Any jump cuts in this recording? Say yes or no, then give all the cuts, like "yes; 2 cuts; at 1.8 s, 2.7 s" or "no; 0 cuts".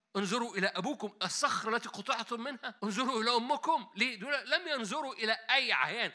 yes; 1 cut; at 2.8 s